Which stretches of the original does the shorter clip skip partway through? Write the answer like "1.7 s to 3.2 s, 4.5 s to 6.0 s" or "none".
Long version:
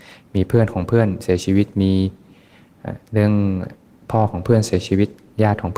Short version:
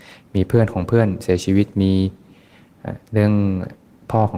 none